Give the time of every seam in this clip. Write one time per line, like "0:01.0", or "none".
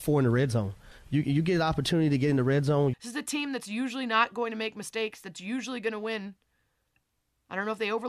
0:02.9